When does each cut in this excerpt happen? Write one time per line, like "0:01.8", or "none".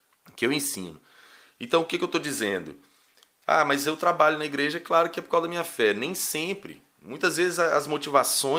none